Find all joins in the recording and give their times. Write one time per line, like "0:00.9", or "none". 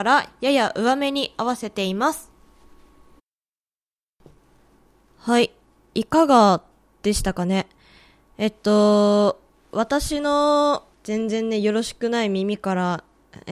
0:10.9

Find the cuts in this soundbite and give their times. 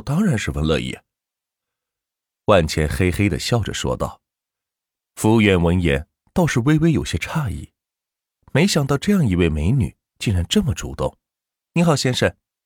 0:05.0
0:11.6

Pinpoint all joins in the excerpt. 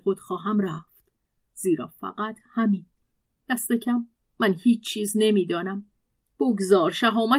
0:04.3

